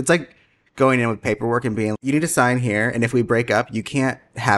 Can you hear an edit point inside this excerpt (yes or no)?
yes